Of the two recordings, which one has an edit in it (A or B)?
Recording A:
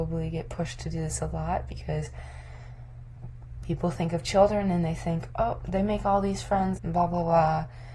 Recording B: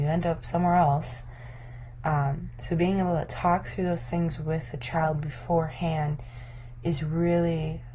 A